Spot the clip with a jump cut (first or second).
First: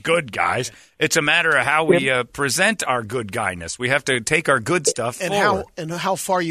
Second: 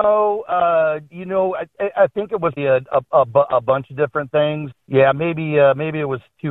second